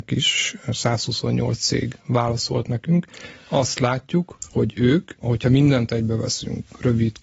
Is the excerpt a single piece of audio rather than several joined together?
yes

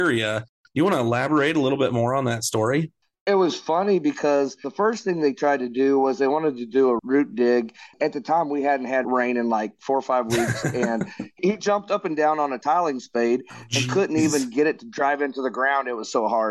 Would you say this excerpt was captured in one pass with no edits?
yes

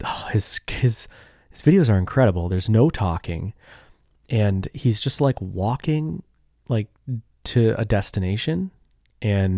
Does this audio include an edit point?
no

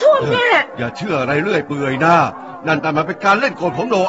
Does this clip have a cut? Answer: yes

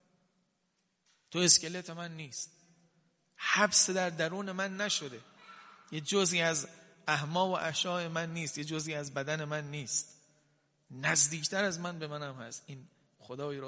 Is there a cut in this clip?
no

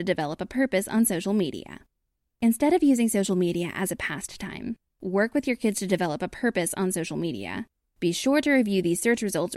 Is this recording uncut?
no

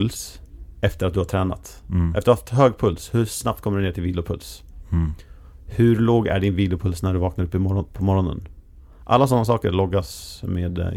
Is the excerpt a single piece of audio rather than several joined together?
yes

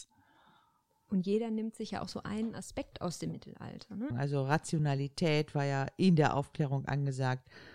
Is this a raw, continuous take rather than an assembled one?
no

